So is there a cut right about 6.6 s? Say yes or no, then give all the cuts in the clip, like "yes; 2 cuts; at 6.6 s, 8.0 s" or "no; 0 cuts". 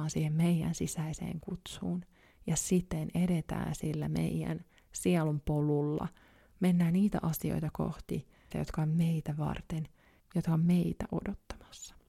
no; 1 cut; at 8.5 s